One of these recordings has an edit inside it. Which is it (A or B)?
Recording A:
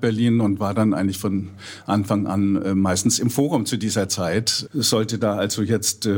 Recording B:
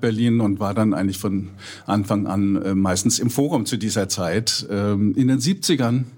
A